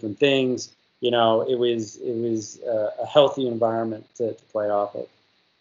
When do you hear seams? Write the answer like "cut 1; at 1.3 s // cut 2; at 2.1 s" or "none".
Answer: none